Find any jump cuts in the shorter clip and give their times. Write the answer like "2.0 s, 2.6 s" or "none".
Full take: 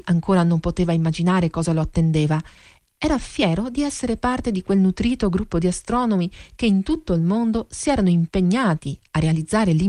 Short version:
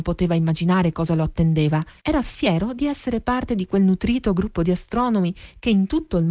2.0 s